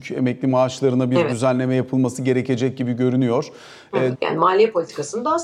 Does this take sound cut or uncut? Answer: cut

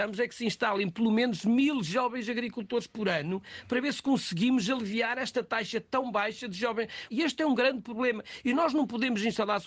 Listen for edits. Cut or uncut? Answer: cut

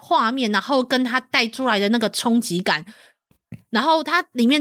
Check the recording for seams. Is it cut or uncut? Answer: uncut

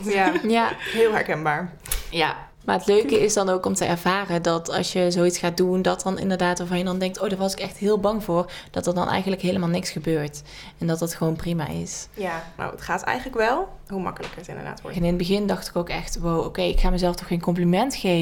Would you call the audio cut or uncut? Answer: cut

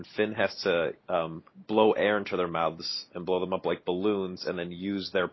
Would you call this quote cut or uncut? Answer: cut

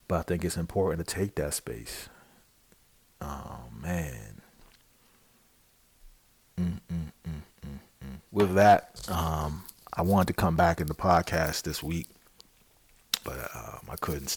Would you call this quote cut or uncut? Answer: cut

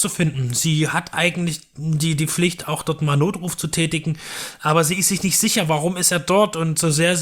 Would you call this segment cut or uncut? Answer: uncut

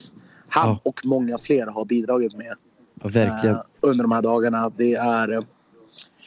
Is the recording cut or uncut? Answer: cut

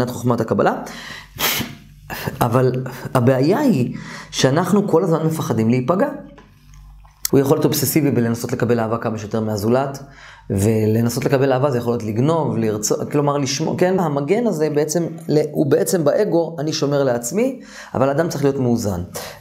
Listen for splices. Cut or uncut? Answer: cut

